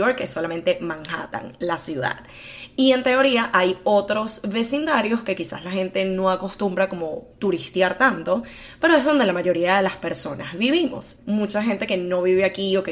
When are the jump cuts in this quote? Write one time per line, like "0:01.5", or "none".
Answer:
0:11.2